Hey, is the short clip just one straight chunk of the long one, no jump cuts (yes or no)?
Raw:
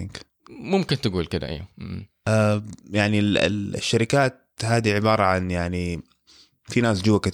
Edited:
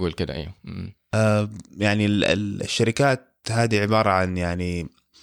yes